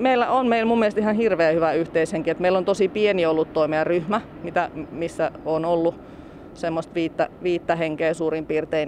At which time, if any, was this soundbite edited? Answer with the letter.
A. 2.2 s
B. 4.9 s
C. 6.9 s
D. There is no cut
D